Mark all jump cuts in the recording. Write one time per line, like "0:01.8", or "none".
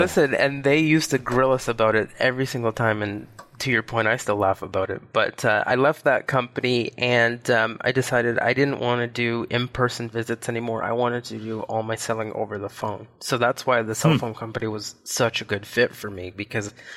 none